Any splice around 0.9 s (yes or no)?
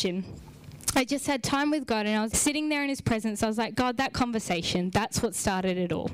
no